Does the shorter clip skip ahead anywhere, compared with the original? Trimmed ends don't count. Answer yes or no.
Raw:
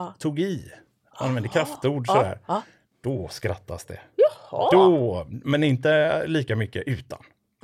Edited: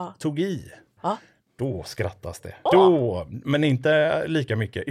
yes